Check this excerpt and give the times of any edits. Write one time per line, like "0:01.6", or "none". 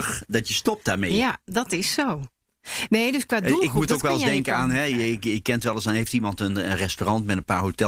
none